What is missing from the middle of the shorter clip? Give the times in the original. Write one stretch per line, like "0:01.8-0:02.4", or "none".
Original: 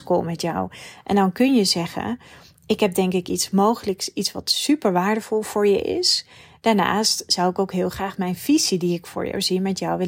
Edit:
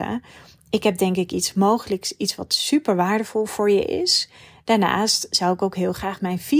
none

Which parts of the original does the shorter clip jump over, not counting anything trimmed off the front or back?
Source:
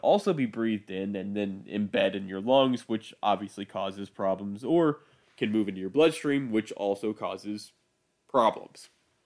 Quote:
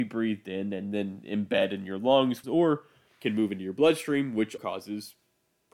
0:02.9-0:04.6
0:06.7-0:07.1

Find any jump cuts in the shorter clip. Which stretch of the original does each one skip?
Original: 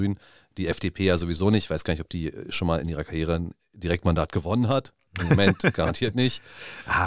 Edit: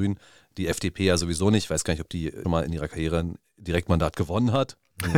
0:02.4-0:02.6

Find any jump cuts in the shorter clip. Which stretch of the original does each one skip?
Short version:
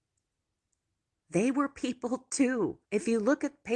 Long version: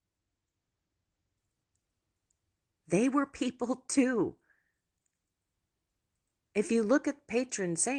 0:04.4-0:06.5

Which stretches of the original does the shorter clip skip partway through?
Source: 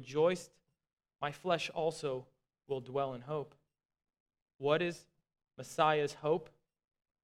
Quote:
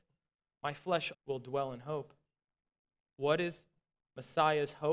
0:01.7-0:02.6

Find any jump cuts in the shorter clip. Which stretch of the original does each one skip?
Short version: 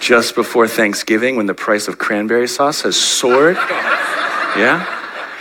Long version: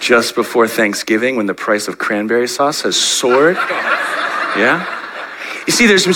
none

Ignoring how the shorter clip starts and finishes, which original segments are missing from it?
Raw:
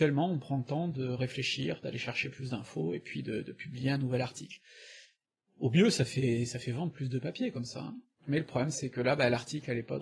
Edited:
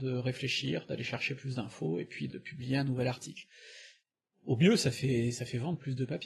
0:03.2-0:03.4

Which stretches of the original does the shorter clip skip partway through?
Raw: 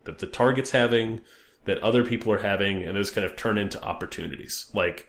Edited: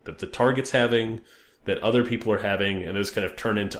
none

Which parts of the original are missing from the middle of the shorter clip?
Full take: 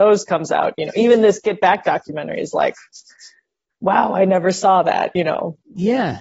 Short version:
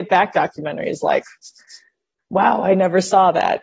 none

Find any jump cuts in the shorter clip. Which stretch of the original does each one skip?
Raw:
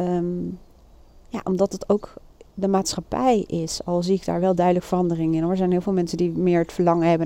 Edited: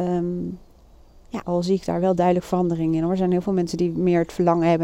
0:01.4-0:03.8

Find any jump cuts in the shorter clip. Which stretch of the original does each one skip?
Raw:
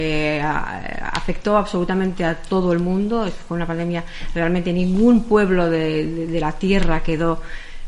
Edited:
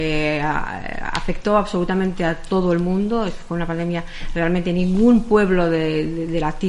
none

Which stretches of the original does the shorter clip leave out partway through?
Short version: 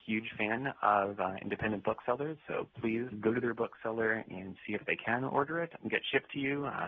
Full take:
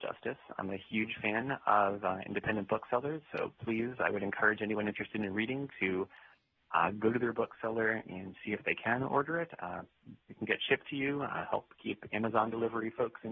0:04.0-0:06.9
0:09.6-0:10.3

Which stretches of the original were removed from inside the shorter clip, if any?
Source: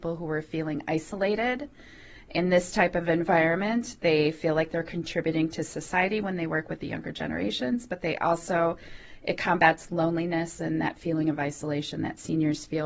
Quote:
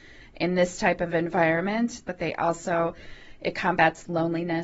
0:04.0-0:07.9

